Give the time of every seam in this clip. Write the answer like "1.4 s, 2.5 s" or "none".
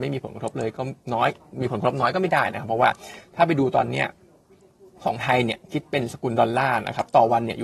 1.0 s

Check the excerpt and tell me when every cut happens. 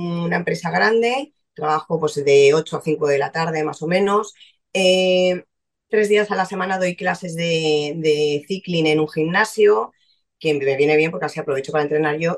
5.9 s

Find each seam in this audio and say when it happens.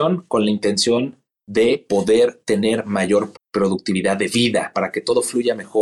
3.3 s, 4.7 s

